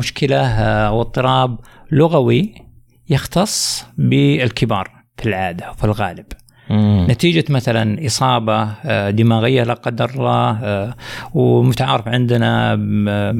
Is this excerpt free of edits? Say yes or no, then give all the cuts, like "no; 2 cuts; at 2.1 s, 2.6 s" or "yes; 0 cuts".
yes; 0 cuts